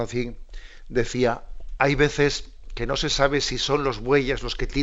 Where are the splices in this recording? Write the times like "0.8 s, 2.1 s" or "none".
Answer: none